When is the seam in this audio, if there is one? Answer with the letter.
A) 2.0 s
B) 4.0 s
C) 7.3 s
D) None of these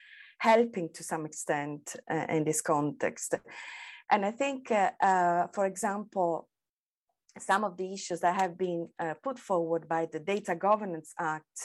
B